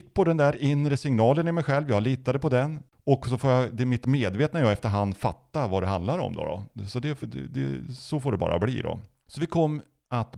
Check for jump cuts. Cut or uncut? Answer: uncut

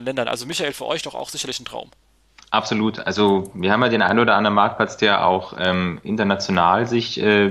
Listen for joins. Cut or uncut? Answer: uncut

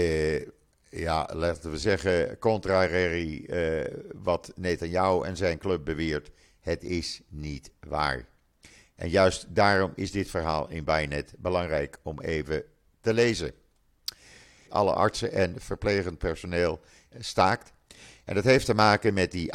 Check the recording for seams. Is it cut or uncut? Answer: cut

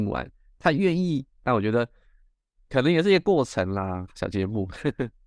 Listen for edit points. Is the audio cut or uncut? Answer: cut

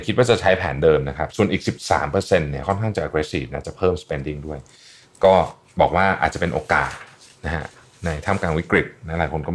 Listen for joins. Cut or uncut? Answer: uncut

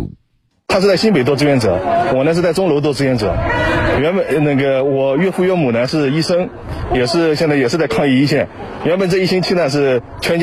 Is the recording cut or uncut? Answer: uncut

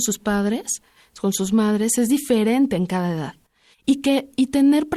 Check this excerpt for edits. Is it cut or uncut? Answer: cut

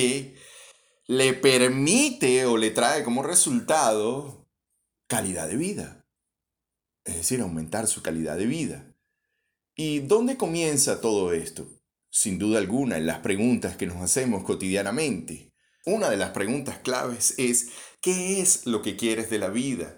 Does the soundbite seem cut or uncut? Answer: cut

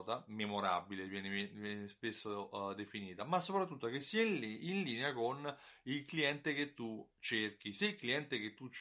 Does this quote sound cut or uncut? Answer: uncut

